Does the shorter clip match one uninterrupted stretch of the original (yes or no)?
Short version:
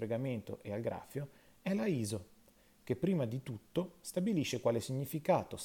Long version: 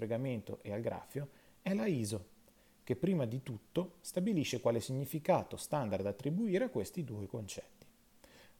yes